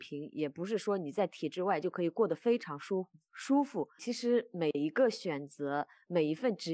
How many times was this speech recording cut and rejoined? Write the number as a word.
one